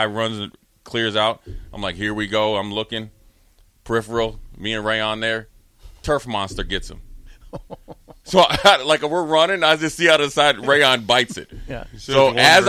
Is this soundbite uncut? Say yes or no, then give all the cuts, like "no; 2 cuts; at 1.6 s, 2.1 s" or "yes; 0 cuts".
yes; 0 cuts